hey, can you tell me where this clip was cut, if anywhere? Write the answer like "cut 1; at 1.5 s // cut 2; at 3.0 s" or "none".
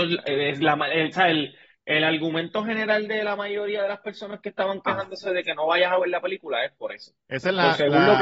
none